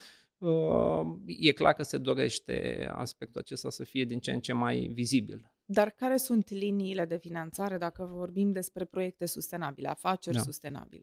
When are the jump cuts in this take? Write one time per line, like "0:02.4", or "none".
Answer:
none